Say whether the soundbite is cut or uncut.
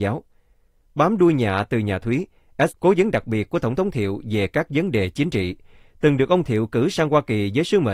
cut